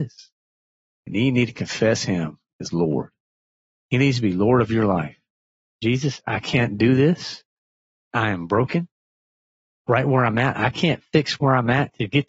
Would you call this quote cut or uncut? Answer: uncut